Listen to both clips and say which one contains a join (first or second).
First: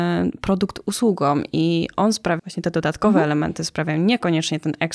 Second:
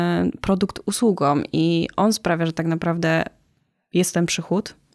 first